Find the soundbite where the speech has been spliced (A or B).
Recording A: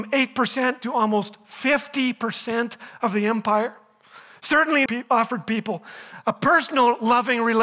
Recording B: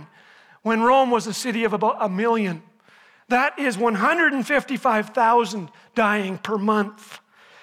A